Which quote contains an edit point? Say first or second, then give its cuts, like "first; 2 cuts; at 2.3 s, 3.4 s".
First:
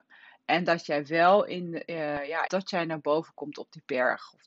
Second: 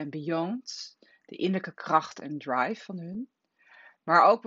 first; 1 cut; at 2.5 s